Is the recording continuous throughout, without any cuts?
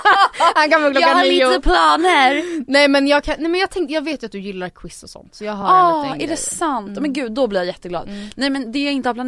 yes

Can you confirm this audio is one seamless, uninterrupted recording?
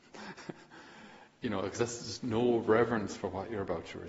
yes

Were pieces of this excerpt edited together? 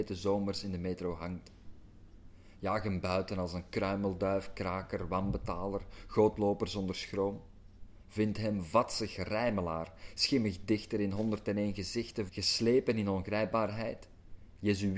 yes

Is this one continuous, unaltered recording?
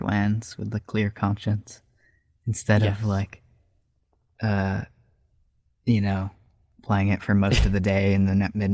yes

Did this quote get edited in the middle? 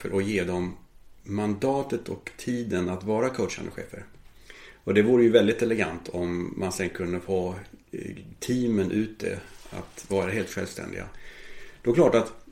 no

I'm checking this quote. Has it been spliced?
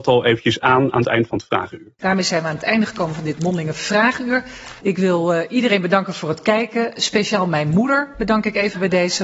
yes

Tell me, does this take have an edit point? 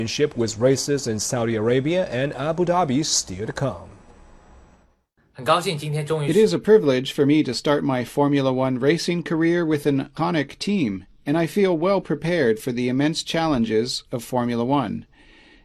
no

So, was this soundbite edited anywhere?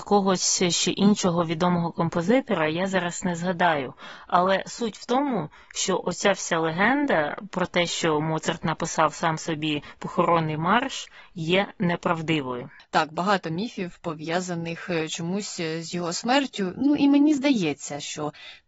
no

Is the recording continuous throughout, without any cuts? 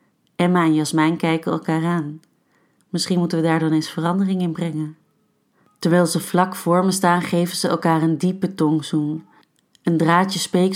yes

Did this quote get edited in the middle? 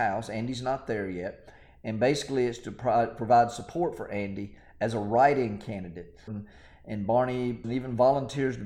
yes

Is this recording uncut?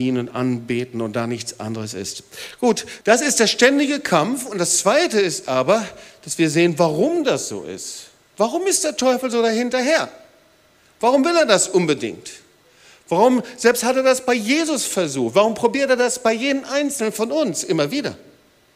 no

